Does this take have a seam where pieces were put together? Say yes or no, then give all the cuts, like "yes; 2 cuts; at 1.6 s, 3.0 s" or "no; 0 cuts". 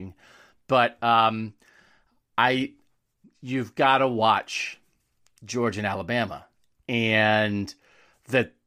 yes; 1 cut; at 3.2 s